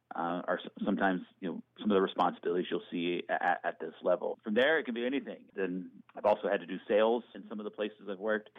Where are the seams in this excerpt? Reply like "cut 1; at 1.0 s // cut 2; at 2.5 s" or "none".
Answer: cut 1; at 5.5 s